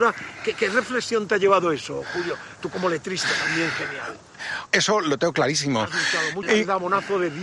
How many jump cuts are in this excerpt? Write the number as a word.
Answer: two